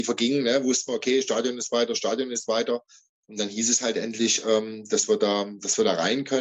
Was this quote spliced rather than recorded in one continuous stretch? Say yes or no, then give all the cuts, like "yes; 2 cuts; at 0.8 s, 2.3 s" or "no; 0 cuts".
no; 0 cuts